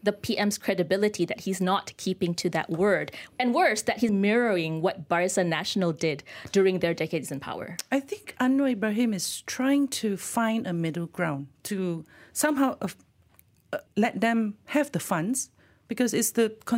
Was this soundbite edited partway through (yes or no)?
yes